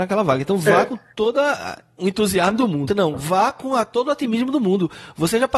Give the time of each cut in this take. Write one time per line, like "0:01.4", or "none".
0:02.9